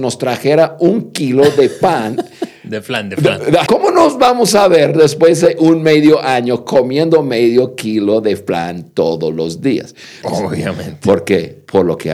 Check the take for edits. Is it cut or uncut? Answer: cut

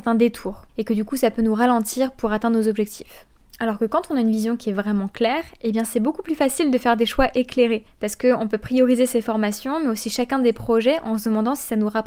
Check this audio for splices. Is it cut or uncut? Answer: uncut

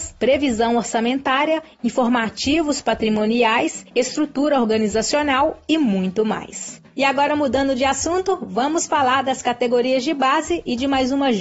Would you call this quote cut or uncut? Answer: uncut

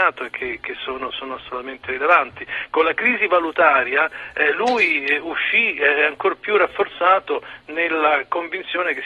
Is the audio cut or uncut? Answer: uncut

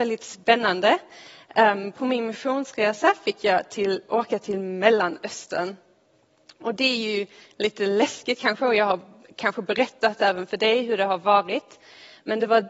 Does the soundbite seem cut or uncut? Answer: uncut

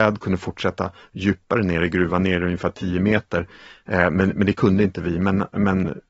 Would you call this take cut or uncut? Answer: uncut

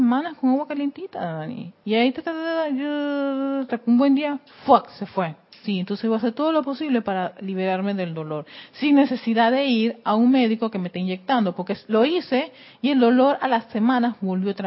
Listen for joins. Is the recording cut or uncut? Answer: cut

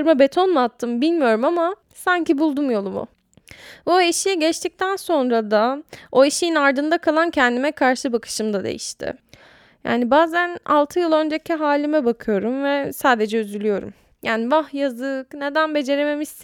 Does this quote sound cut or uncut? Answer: uncut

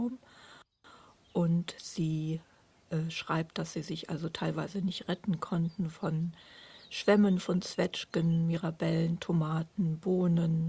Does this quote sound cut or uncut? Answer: uncut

